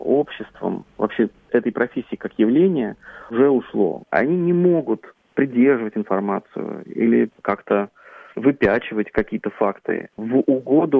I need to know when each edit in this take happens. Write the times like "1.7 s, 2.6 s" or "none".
4.0 s, 7.4 s